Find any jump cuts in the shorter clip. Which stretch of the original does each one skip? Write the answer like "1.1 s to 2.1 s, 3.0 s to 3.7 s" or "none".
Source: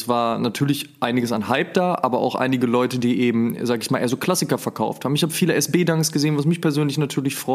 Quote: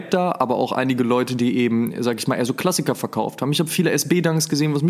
none

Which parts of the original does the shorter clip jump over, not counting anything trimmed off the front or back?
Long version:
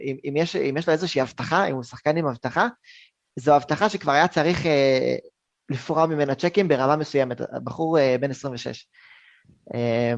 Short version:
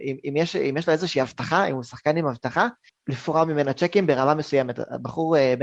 2.9 s to 5.5 s

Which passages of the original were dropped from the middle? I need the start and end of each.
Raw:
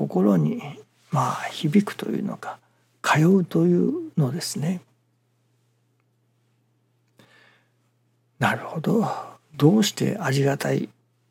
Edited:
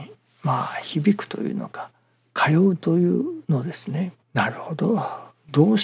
4.9 s to 8.3 s

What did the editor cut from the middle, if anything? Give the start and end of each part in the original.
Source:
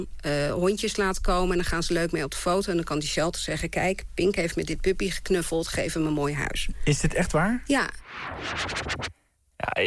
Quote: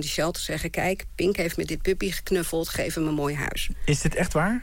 none

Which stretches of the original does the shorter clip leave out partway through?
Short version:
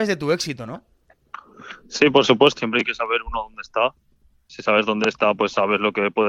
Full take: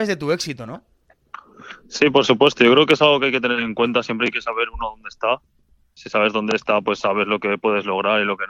2.6 s to 4.0 s

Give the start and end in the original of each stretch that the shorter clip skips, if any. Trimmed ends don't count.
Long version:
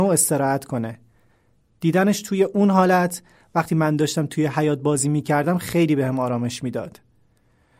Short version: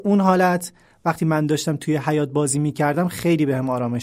none

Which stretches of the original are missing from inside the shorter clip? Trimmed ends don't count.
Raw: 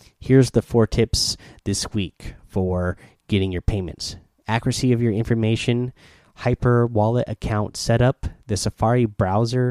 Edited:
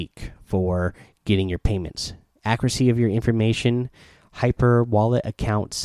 none

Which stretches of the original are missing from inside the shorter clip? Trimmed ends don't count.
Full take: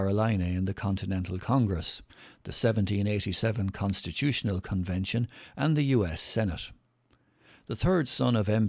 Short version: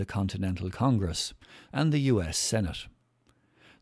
2.4 s to 5.5 s

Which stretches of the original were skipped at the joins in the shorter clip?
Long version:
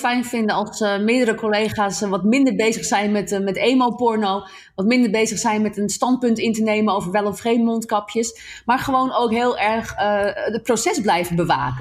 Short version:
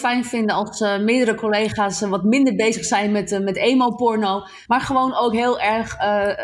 4.7 s to 8.6 s

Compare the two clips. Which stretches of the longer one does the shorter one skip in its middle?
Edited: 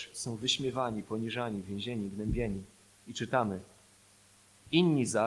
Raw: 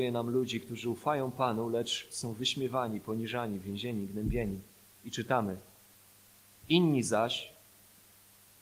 none

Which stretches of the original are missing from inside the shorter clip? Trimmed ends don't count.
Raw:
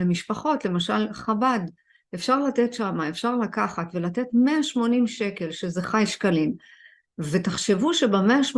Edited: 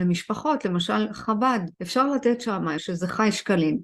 1.7 s to 2.1 s, 3.1 s to 5.5 s

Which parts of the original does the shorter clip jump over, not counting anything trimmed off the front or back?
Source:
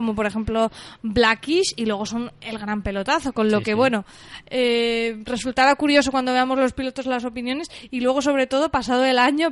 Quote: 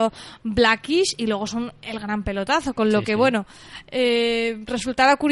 none

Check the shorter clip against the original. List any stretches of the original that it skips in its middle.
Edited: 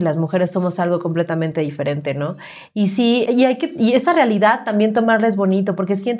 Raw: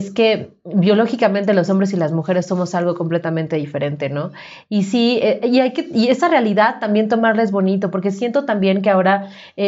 5.2 s to 5.4 s

